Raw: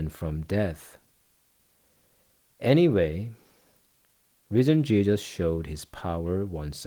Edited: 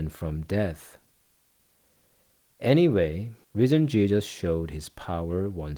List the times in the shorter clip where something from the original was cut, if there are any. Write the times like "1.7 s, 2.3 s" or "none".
3.4 s